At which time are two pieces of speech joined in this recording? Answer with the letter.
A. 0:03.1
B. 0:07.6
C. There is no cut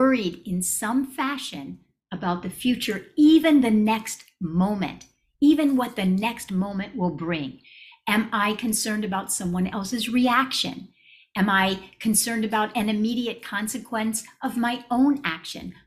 C